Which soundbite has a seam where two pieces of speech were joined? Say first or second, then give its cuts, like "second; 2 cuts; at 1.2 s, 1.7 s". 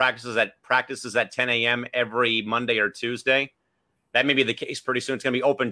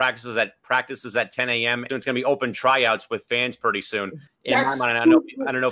second; 2 cuts; at 1.9 s, 4.3 s